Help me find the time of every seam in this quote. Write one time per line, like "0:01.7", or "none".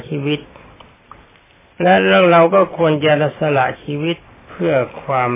none